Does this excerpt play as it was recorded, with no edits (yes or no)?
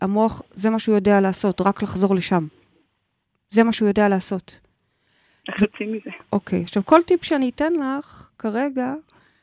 yes